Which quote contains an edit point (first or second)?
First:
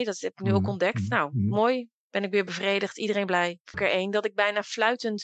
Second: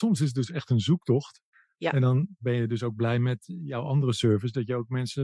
first